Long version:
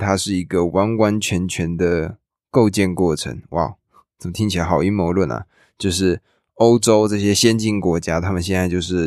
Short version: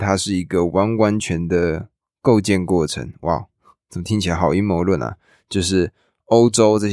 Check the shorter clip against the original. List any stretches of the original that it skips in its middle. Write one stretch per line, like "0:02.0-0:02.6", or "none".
0:01.2-0:01.5